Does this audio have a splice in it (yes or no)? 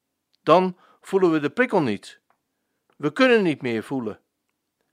no